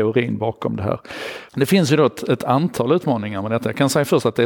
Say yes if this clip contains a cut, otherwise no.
yes